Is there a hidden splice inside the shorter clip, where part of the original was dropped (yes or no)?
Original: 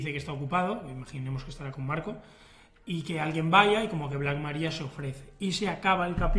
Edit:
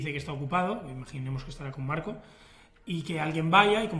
no